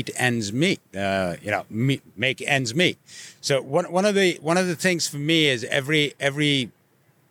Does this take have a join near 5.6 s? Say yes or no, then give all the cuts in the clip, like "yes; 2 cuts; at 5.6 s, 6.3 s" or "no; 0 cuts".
no; 1 cut; at 3.3 s